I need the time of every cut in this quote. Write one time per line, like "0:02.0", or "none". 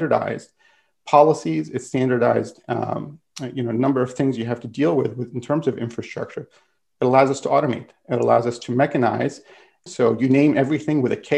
0:09.9